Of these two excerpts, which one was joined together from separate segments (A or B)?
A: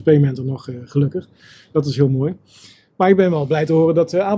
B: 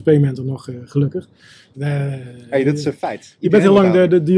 B